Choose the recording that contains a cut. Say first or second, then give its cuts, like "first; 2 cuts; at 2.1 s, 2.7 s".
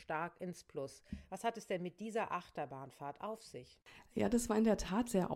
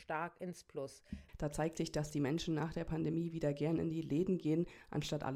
second; 1 cut; at 1.3 s